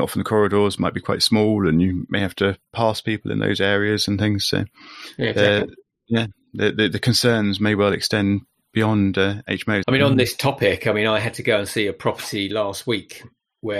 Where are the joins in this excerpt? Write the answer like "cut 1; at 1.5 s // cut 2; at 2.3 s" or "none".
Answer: cut 1; at 9.8 s